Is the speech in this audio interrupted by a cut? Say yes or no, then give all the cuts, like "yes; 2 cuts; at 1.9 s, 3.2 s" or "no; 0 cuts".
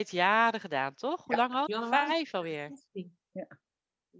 yes; 2 cuts; at 1.7 s, 3.2 s